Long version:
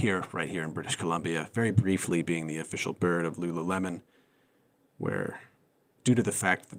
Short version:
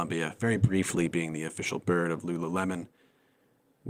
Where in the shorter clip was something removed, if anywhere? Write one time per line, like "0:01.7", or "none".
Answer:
none